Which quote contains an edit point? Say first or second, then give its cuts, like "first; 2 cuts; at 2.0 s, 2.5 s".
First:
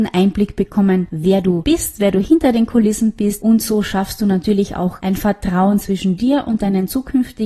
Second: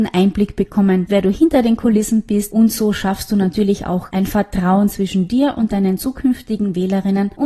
second; 1 cut; at 1.1 s